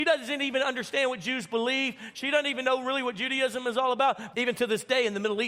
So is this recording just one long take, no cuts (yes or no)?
no